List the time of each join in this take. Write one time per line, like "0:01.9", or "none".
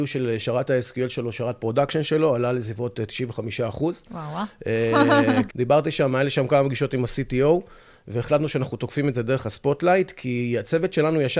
0:05.5